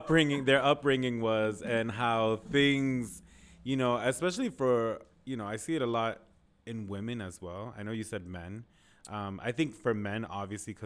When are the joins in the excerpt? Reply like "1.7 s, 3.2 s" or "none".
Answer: none